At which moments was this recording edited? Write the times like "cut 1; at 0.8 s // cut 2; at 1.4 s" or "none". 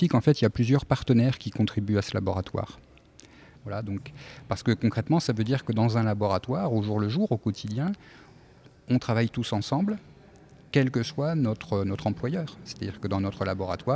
cut 1; at 3.5 s